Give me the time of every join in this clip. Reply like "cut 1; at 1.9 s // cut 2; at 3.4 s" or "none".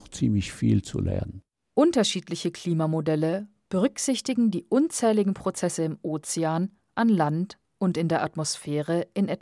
none